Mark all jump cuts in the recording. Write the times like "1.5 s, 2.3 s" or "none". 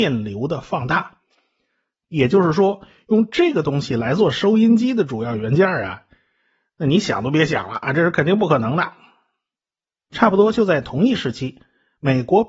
2.0 s